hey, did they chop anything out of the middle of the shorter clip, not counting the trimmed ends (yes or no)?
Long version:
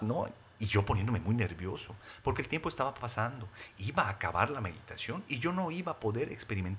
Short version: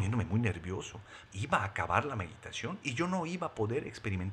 yes